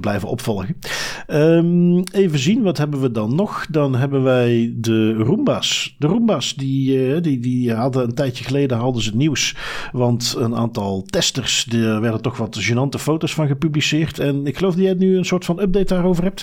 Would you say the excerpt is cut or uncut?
uncut